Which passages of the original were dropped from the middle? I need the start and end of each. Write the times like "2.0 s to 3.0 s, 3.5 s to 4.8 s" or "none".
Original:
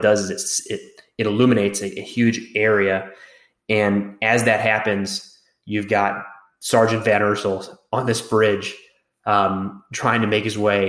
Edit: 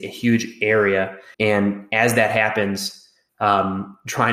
3.3 s to 3.6 s, 5.6 s to 9.1 s

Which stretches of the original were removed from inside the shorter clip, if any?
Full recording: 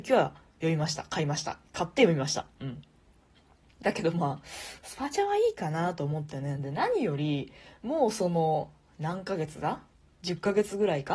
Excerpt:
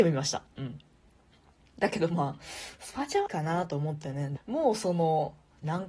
5.3 s to 5.5 s, 6.6 s to 7.7 s

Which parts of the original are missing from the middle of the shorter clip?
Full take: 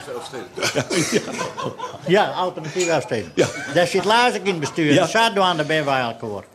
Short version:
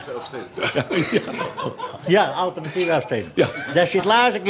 none

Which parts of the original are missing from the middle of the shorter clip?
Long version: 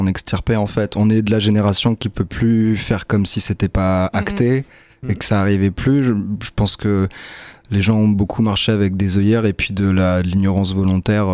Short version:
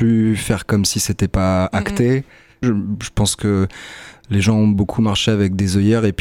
5.0 s to 6.0 s

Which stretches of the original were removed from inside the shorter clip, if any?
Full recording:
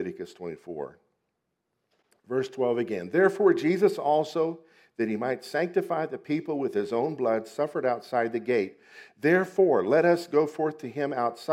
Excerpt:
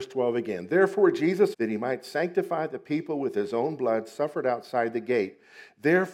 4.0 s to 4.9 s

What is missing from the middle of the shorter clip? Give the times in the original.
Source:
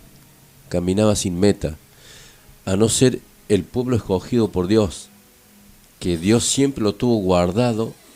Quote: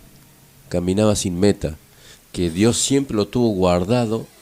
2.1 s to 5.8 s

